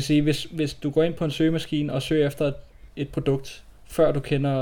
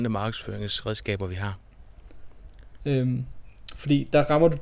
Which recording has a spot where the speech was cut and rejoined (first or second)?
second